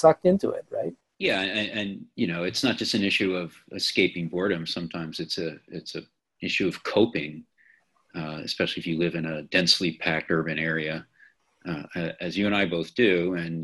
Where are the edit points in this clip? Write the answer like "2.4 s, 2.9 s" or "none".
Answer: none